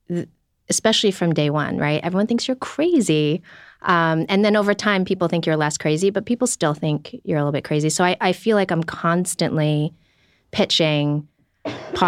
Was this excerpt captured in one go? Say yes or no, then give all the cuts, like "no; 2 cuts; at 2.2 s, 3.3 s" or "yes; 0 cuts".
yes; 0 cuts